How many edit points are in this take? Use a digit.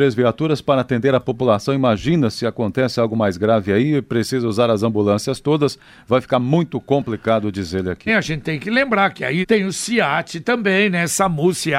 2